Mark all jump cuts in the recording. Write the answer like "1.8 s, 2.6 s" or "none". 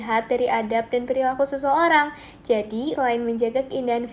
3.0 s